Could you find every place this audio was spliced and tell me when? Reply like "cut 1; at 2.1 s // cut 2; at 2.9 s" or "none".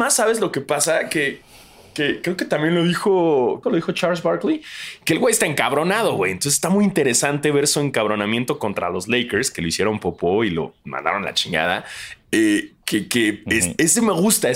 cut 1; at 3.6 s